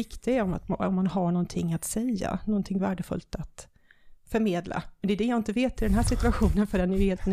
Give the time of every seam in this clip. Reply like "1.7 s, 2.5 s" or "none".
none